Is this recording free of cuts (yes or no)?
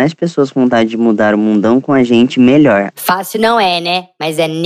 no